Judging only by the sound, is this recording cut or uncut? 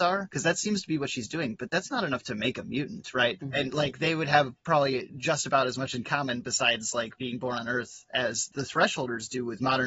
cut